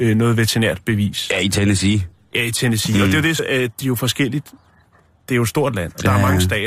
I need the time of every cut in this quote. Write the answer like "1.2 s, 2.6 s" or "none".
3.4 s